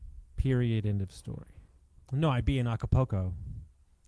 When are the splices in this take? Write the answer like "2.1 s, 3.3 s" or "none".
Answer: 2.0 s

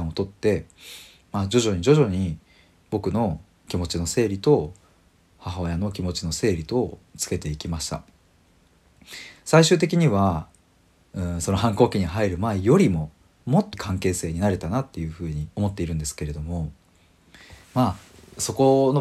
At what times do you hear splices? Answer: 13.7 s, 15.5 s, 17.6 s

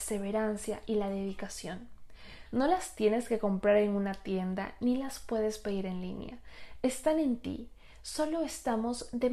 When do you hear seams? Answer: 2.5 s

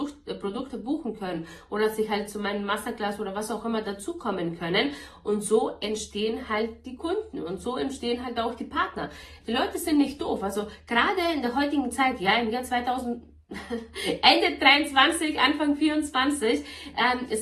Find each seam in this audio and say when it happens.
none

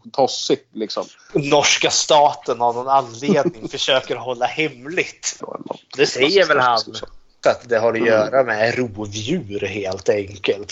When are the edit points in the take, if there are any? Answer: 1.3 s, 5.4 s, 7.4 s

